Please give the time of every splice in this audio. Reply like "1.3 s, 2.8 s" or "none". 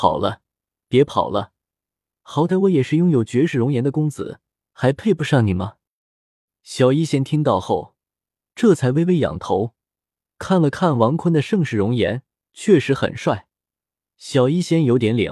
none